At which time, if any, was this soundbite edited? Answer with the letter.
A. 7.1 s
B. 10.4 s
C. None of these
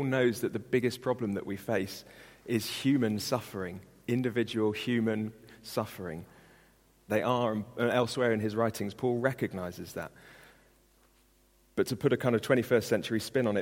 A